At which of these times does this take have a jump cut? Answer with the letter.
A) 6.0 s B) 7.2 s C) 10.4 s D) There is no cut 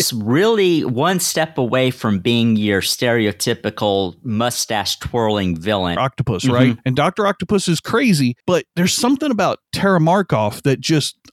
A